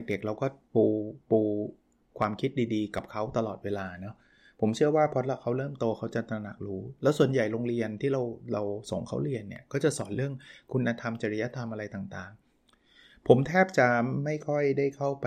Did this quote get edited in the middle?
no; 0 cuts

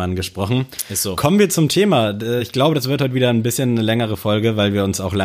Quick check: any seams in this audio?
no; 0 cuts

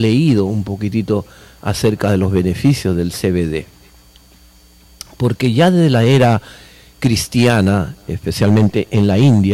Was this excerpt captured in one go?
yes; 0 cuts

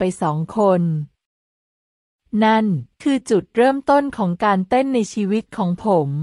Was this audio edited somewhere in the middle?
no; 0 cuts

